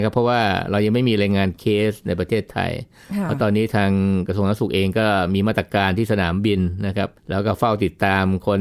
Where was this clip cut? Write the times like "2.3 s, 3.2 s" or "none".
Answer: 7.2 s